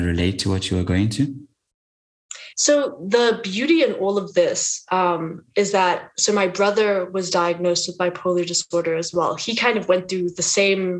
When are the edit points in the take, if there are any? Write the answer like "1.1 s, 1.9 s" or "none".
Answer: none